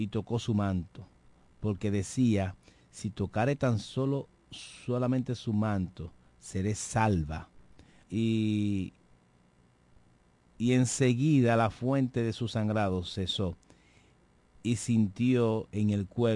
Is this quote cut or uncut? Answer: cut